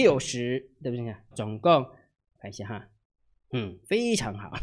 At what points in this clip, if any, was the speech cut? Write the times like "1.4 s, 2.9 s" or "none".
1.3 s